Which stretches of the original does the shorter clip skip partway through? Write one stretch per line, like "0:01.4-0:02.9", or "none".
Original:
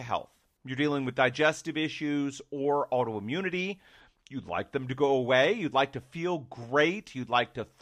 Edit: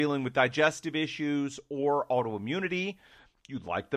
none